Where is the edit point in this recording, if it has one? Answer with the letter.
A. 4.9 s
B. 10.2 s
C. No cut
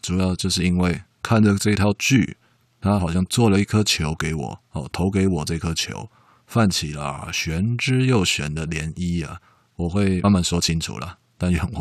B